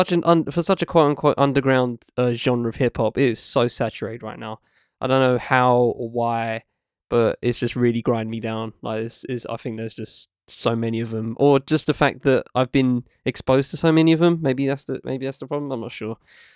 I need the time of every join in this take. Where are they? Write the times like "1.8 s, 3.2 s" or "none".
none